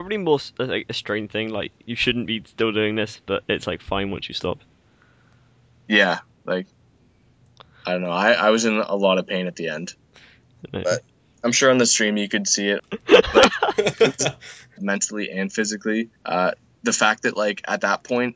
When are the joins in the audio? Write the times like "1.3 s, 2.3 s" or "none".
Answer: 12.8 s, 14.8 s, 16.2 s